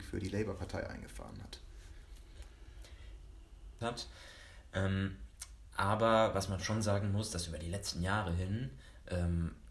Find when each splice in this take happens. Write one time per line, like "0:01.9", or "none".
0:03.8
0:06.3